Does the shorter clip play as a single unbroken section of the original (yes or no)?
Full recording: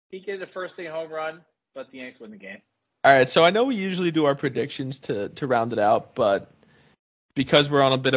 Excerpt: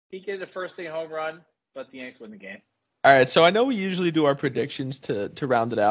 yes